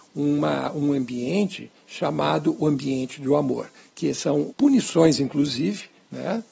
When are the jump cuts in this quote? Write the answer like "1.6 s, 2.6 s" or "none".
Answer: 4.5 s